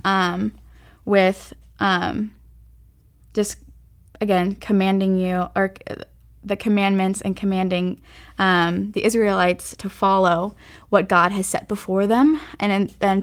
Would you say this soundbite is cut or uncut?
uncut